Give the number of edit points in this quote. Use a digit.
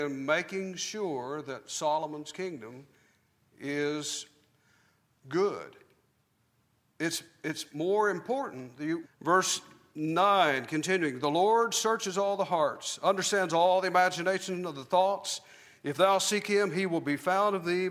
2